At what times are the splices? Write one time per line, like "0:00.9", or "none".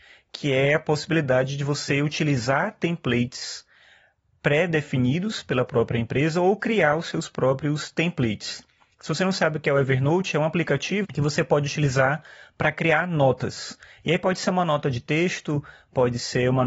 0:11.0